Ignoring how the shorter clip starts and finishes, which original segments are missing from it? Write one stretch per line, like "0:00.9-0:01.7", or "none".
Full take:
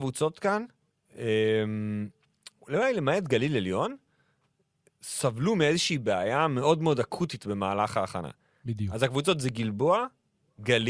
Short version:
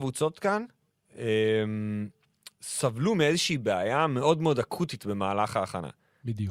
0:02.5-0:04.9

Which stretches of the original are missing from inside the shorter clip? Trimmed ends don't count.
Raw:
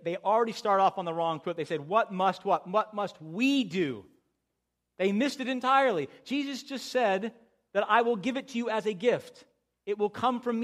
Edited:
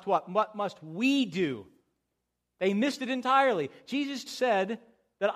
0:06.6-0:06.8

